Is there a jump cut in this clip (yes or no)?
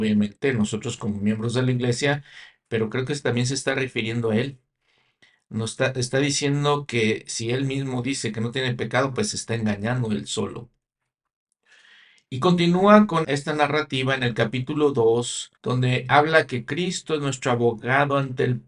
yes